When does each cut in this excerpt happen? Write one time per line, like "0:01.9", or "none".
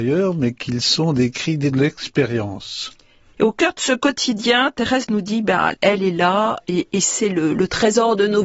0:03.3
0:05.7